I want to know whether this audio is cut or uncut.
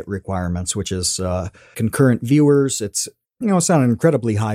cut